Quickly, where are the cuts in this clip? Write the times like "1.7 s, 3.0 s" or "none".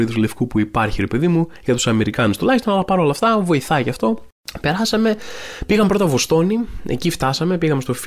none